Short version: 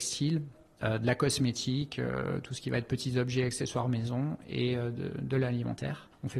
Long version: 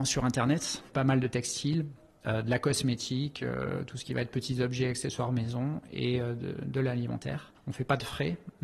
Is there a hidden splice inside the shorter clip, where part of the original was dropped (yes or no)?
no